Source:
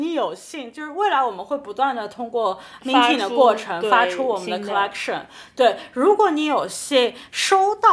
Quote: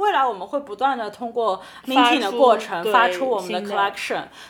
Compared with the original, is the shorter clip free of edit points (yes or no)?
yes